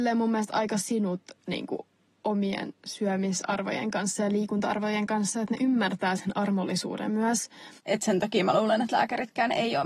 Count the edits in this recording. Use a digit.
1